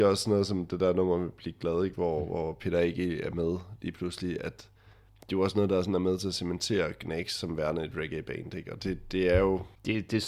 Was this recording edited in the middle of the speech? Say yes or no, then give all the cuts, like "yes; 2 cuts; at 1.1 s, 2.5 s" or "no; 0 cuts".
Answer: no; 0 cuts